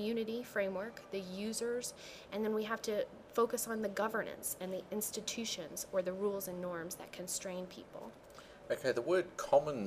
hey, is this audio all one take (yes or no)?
yes